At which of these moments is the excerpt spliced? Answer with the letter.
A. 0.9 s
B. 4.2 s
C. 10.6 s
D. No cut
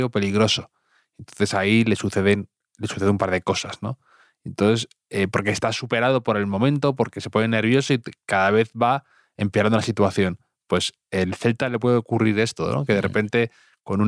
D